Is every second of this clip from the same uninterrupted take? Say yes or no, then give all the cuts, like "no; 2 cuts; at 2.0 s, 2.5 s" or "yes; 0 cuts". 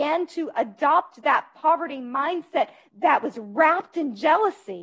no; 1 cut; at 2.9 s